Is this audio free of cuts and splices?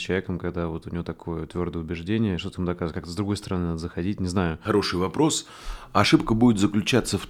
yes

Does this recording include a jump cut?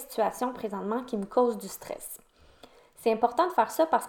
no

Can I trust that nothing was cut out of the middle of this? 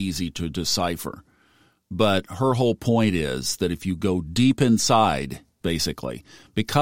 no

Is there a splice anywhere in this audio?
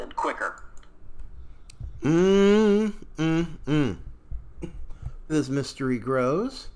yes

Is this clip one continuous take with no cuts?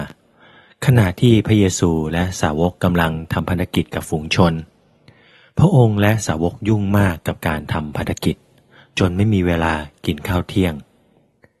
yes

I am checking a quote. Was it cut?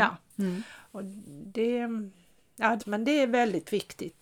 yes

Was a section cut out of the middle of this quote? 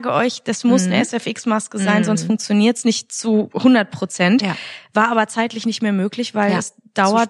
no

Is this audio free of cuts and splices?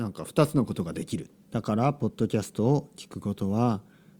no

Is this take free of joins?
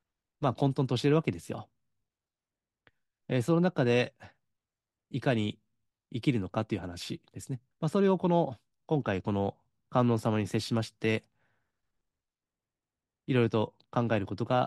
no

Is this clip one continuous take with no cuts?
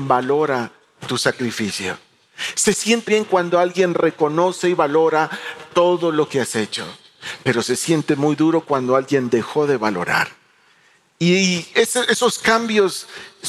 no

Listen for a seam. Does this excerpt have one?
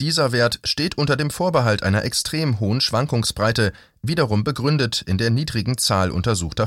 no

